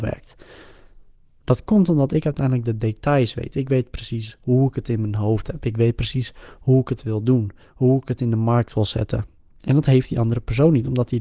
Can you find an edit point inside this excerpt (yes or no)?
no